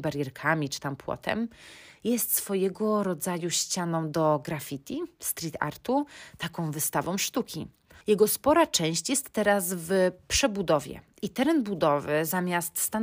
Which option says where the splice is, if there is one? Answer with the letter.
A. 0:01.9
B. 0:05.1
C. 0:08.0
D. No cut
C